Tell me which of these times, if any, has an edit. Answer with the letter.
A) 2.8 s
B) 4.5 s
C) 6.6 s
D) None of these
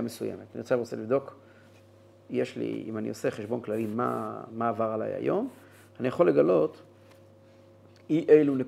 D